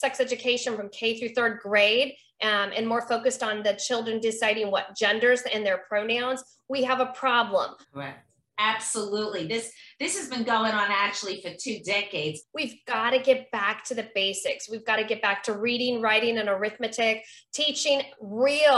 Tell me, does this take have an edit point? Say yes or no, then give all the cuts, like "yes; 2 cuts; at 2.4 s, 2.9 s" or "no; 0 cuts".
yes; 2 cuts; at 7.8 s, 12.4 s